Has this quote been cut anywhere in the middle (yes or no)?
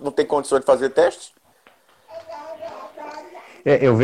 no